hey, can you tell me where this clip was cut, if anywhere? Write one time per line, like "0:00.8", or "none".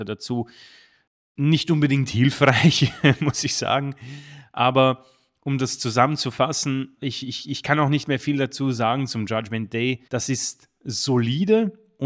0:07.0
0:10.1